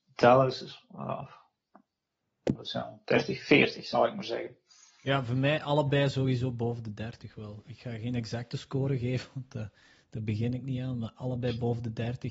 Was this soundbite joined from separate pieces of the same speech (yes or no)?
yes